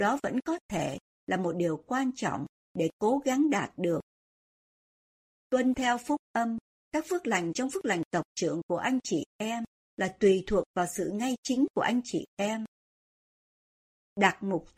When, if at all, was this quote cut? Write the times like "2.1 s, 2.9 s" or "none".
none

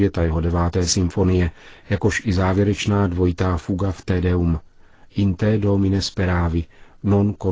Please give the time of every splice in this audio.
none

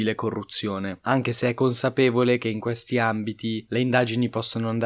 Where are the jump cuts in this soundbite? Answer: none

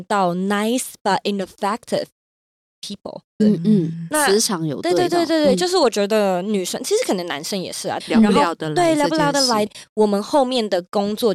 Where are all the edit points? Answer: 3.4 s, 8.0 s, 9.7 s

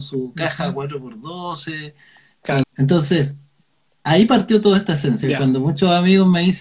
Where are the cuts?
2.6 s, 5.2 s

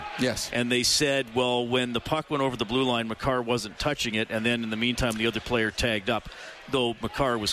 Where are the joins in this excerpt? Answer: none

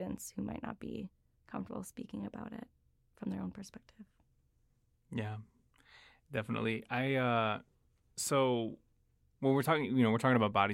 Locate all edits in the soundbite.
none

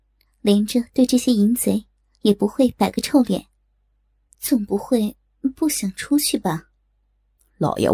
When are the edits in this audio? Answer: 4.3 s

